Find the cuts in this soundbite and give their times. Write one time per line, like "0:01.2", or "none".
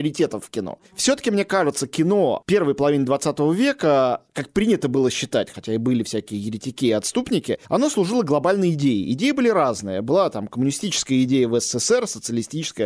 none